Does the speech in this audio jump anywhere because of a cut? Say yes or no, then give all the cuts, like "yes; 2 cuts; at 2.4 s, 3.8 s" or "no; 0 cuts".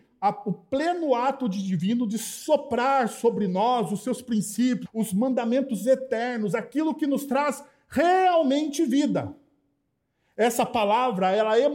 yes; 1 cut; at 4.9 s